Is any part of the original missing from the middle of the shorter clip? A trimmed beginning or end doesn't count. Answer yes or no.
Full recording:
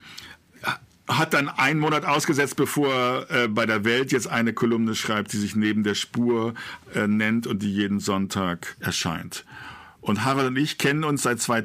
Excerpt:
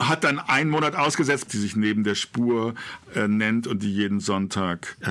yes